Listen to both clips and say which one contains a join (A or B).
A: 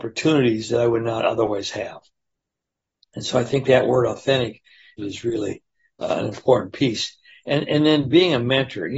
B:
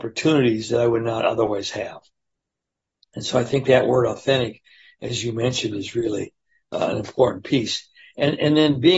A